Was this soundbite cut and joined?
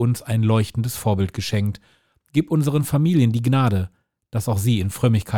no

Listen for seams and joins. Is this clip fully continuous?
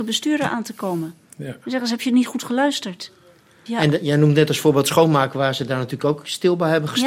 no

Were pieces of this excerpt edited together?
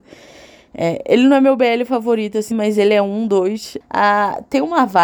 yes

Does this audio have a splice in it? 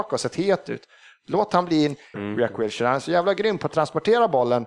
yes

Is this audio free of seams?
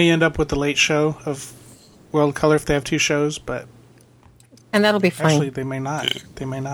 yes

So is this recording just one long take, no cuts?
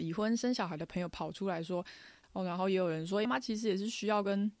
no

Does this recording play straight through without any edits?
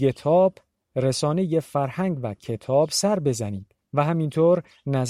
no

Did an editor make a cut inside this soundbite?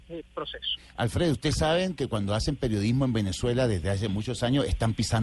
no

